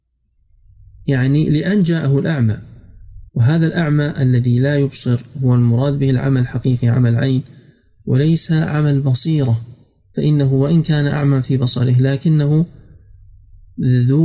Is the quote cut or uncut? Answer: cut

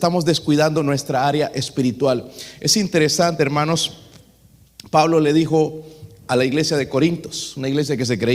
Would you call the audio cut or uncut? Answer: uncut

